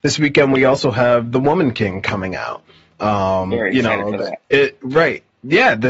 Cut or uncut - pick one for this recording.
uncut